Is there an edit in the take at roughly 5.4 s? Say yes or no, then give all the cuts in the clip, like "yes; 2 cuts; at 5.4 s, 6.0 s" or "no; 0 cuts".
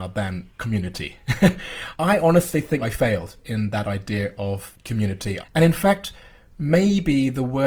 yes; 2 cuts; at 2.8 s, 5.4 s